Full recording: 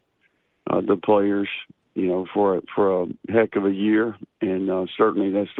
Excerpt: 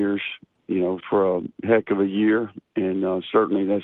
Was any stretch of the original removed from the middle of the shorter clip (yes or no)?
yes